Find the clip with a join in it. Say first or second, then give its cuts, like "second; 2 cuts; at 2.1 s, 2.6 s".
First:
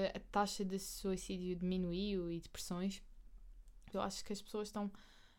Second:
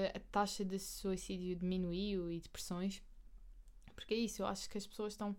first; 1 cut; at 3.9 s